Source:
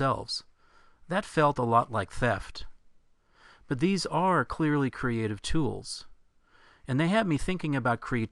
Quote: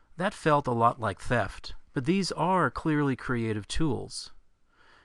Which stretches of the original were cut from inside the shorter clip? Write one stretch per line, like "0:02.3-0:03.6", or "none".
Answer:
0:02.8-0:03.6

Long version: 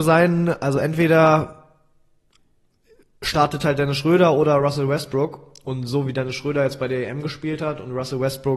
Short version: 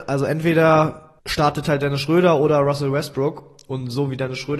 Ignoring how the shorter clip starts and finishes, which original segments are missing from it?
0:01.7-0:03.2

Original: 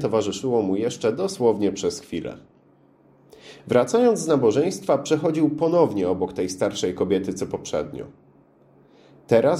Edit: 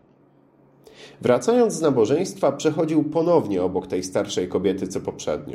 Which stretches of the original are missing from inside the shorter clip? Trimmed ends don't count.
none

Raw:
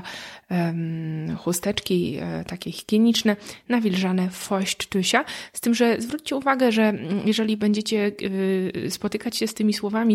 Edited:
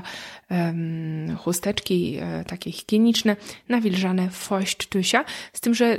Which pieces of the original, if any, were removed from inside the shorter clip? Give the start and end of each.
none

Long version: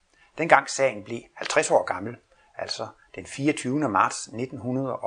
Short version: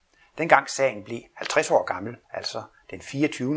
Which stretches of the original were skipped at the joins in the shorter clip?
0:02.2-0:02.5

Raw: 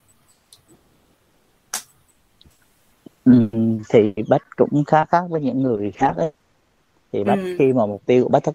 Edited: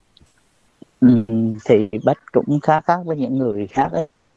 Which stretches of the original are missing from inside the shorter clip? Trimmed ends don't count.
none

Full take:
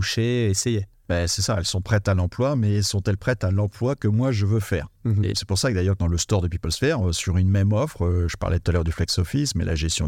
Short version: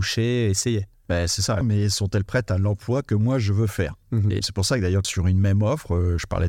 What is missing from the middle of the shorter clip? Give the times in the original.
0:01.6-0:02.5
0:06.0-0:07.1

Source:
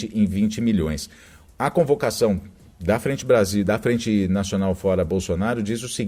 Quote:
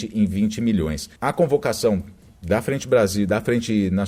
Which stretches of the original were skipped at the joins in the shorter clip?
0:01.2-0:01.5

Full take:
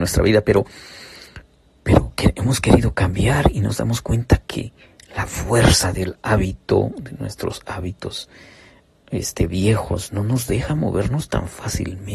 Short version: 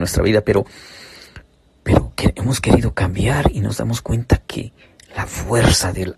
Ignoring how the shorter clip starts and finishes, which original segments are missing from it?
none

